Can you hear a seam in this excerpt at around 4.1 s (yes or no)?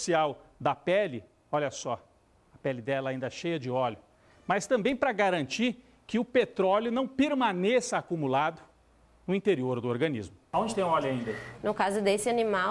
no